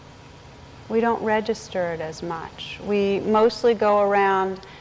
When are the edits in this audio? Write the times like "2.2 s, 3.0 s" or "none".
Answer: none

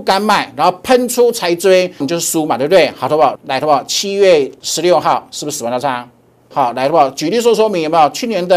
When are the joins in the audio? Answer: 2.0 s, 3.4 s, 6.5 s

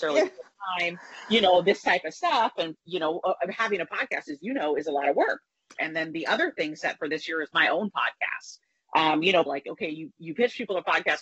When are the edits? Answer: 5.8 s, 9.5 s

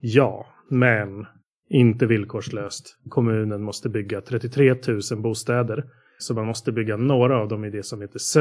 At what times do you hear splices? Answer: 6.2 s

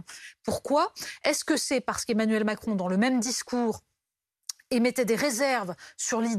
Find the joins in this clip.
none

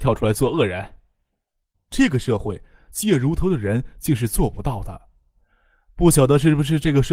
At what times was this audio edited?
1.7 s

